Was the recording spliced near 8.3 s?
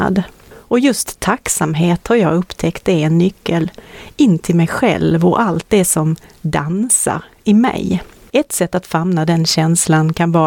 yes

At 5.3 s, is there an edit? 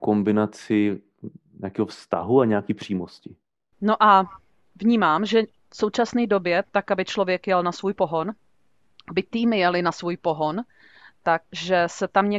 no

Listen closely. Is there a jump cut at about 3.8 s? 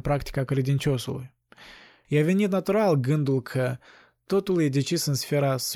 no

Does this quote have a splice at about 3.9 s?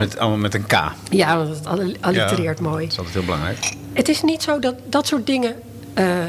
no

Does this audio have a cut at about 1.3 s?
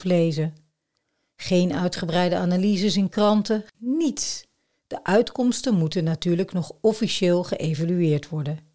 no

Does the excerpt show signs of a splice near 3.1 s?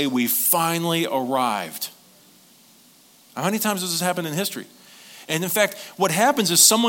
no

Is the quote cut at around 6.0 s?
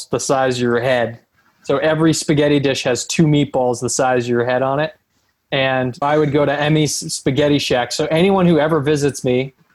yes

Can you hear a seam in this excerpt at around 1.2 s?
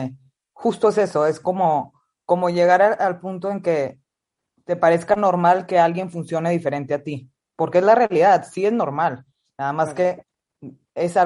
no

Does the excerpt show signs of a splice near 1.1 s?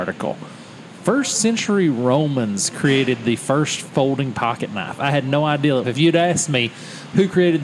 no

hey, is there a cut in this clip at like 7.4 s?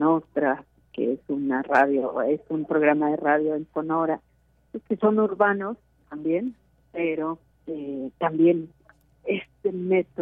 no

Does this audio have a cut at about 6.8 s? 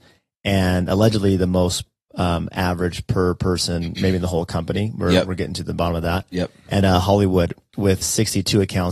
yes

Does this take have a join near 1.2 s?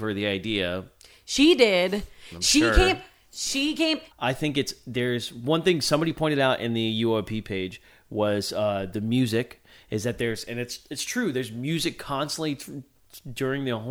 no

